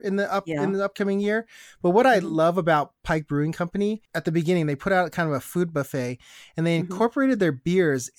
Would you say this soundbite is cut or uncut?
uncut